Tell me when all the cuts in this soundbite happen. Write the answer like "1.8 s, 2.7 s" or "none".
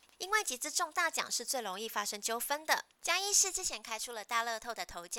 2.9 s